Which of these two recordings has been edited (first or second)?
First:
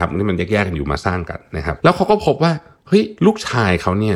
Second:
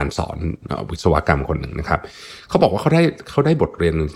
first